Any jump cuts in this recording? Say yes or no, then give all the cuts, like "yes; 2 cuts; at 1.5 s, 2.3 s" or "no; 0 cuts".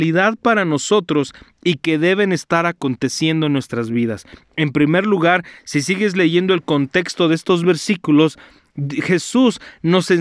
no; 0 cuts